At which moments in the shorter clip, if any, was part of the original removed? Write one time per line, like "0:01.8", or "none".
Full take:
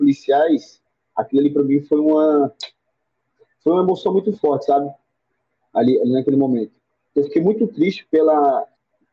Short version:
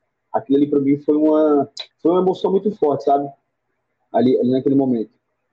0:01.9